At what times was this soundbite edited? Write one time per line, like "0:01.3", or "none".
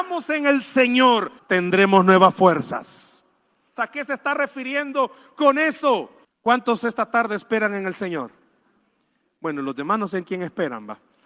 0:01.4
0:03.8
0:06.2